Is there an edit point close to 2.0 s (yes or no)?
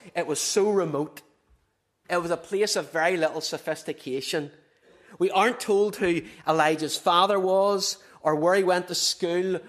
yes